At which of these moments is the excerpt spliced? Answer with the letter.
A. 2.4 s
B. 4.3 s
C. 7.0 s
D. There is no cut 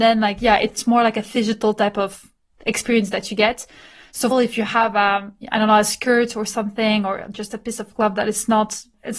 B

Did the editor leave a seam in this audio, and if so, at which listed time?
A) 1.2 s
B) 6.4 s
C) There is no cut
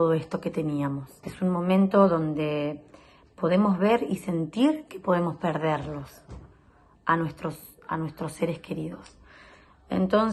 A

